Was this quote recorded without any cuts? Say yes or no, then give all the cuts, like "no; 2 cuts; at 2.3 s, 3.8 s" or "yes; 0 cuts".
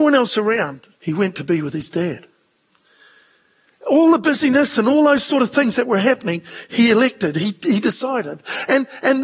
no; 1 cut; at 0.9 s